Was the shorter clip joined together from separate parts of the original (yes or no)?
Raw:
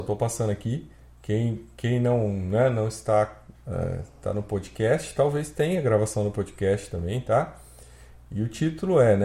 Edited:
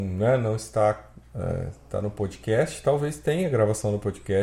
no